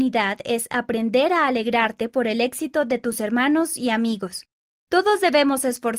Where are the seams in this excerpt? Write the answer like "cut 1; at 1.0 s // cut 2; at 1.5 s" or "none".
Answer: none

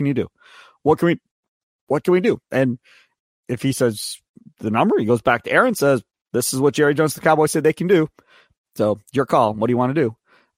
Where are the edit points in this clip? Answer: none

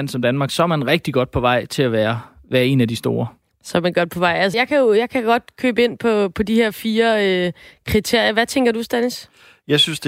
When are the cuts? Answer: cut 1; at 4.5 s

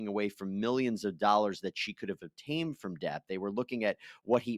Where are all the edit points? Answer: none

